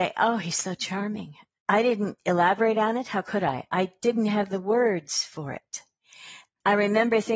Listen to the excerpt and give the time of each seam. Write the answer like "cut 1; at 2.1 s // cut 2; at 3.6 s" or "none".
cut 1; at 1.5 s